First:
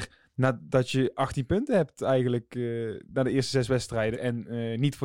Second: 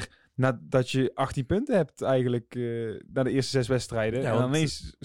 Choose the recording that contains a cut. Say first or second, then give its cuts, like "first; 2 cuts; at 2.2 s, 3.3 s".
first; 1 cut; at 4.1 s